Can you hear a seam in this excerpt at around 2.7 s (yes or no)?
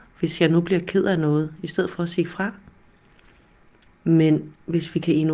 no